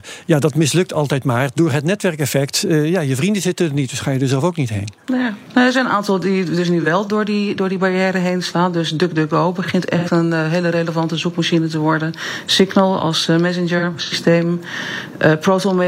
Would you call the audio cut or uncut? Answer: uncut